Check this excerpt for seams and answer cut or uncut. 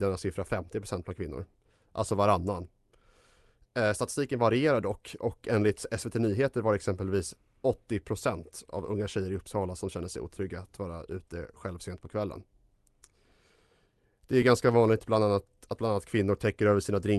uncut